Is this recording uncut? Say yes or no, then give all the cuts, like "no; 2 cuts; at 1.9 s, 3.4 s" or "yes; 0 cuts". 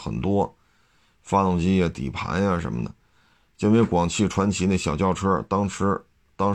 yes; 0 cuts